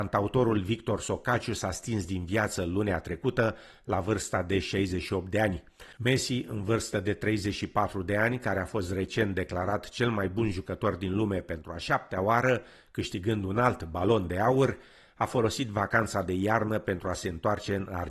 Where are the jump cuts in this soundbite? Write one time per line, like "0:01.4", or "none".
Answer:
0:05.9